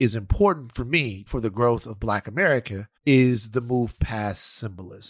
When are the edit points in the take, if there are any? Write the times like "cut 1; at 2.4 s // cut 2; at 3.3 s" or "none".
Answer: cut 1; at 1.3 s // cut 2; at 3.0 s